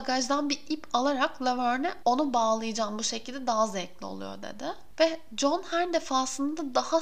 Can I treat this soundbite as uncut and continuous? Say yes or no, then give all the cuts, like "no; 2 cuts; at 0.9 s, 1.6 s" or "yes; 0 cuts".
no; 1 cut; at 4.9 s